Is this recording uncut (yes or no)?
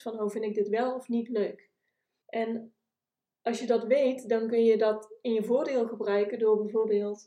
no